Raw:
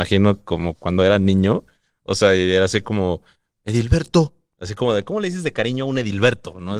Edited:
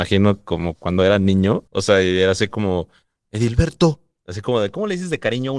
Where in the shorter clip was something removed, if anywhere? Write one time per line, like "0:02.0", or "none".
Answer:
0:01.7